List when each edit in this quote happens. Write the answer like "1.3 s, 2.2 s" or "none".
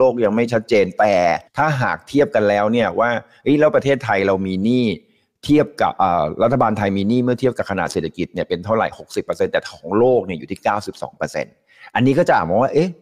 1.5 s